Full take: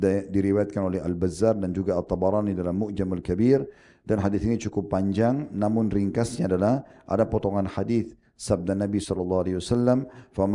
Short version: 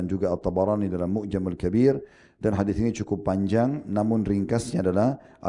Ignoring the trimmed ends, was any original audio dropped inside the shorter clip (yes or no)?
no